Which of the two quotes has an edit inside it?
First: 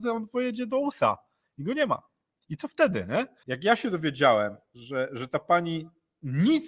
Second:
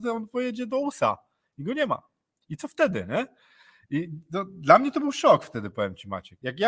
first; 1 cut; at 3.4 s

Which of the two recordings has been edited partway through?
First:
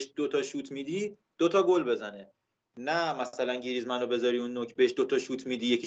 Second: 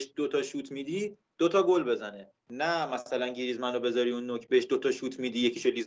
second; 1 cut; at 2.4 s

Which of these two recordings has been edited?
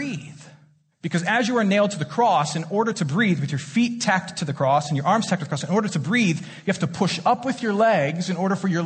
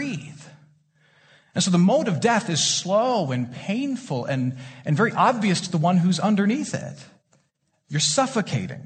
first; 1 cut; at 0.9 s

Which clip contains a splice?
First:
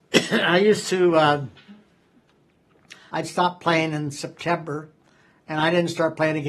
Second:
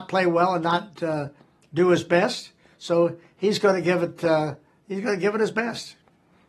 first; 1 cut; at 3.1 s

